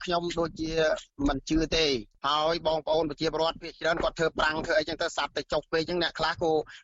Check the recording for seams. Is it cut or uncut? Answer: uncut